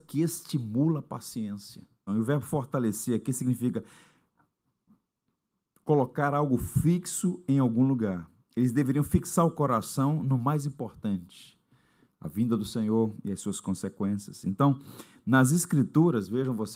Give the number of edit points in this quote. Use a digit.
1